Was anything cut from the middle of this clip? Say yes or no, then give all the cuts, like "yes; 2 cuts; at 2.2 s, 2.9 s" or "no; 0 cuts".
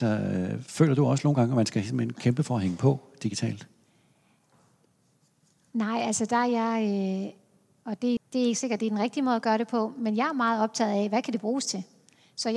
yes; 1 cut; at 8.2 s